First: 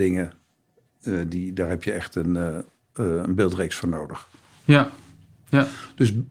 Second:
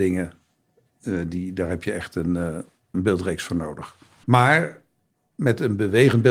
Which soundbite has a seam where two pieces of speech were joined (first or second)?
second